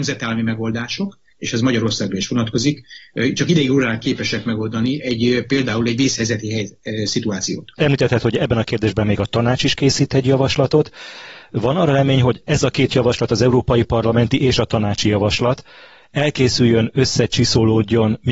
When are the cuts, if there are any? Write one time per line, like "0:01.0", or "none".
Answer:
0:01.3